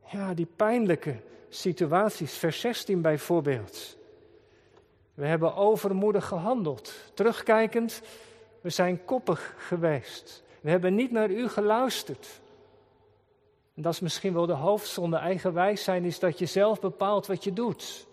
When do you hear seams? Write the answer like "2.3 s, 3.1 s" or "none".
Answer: none